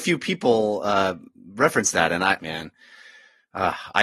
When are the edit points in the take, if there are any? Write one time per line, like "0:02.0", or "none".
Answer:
0:02.4